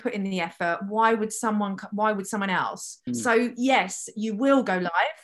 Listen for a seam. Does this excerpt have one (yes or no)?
yes